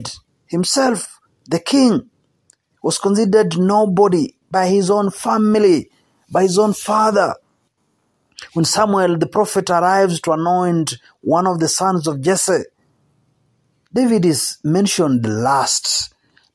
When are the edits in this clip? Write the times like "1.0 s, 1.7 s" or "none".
none